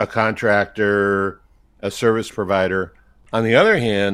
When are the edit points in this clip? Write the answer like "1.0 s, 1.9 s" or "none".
none